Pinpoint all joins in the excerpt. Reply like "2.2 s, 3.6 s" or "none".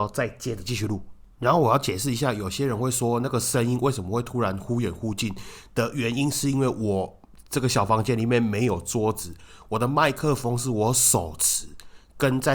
none

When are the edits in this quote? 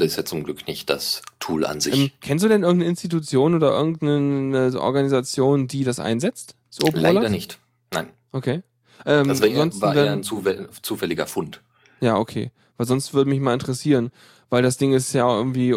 none

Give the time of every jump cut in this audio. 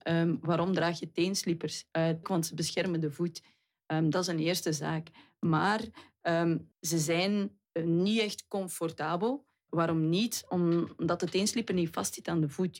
2.2 s, 6.7 s

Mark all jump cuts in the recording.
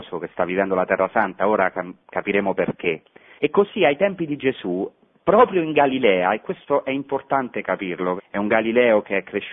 3.4 s, 8.2 s

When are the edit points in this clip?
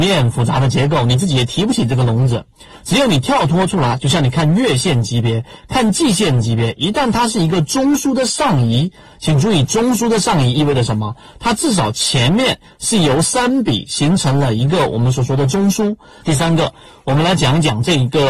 16.2 s

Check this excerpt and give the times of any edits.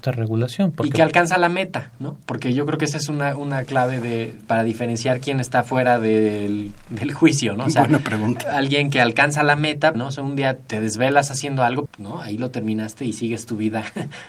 9.9 s, 11.9 s

